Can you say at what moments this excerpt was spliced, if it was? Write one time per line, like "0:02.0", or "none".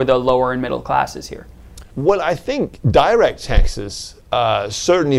0:01.9